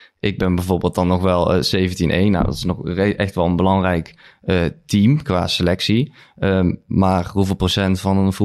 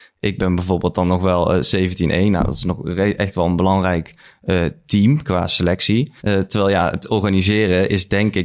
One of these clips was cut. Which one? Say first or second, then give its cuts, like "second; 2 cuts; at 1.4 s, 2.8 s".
second; 1 cut; at 6.2 s